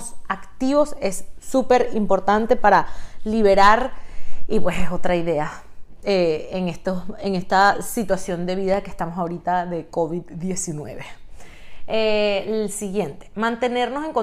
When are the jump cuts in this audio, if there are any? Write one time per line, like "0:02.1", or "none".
none